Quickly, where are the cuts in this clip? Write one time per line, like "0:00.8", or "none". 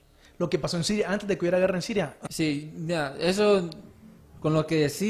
0:02.3